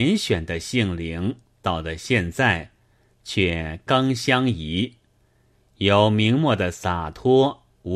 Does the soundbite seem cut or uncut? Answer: cut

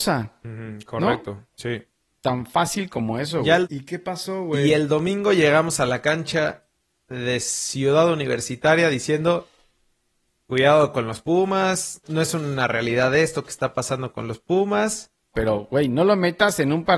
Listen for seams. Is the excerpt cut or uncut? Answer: cut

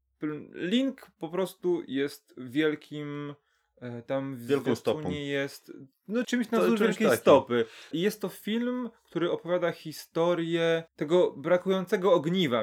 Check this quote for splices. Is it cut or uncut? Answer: cut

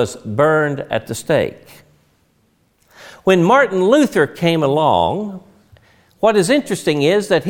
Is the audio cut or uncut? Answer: uncut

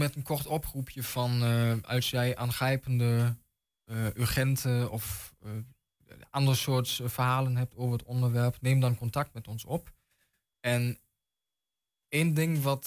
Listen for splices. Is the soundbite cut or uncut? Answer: uncut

